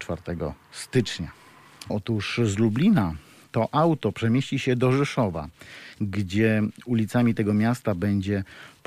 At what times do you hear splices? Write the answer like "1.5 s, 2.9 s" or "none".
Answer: 1.9 s